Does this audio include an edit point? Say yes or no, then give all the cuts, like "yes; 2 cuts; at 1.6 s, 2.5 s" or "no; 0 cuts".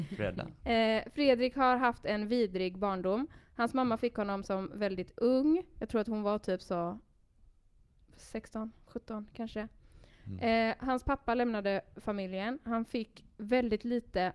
no; 0 cuts